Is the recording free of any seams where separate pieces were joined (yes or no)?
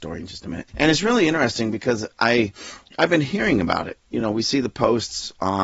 yes